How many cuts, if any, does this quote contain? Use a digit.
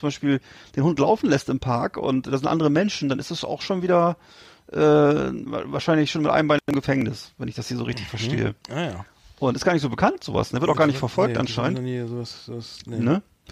0